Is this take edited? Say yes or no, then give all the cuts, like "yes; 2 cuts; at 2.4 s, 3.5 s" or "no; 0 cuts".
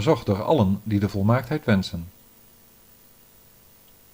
no; 0 cuts